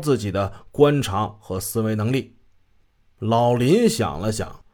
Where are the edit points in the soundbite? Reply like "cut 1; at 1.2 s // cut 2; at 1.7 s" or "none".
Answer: none